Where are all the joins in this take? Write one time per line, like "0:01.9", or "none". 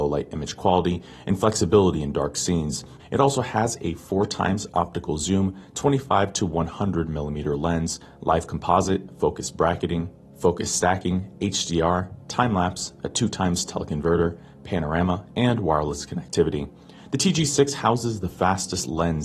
0:03.0